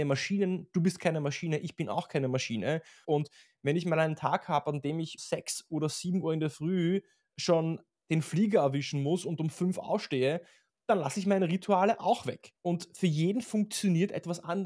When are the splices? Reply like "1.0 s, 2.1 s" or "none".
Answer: 3.0 s, 5.2 s, 12.6 s